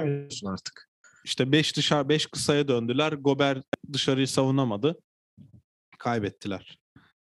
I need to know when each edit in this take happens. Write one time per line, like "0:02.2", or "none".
0:01.2